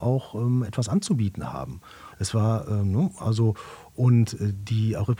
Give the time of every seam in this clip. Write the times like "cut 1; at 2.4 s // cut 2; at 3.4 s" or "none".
cut 1; at 2.1 s

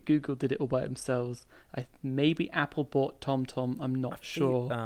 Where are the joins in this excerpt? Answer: none

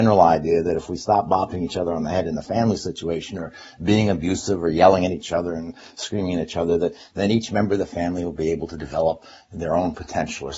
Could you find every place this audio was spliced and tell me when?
none

